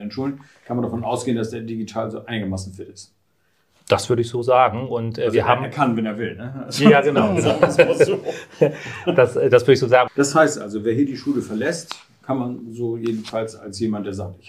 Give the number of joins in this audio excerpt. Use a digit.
1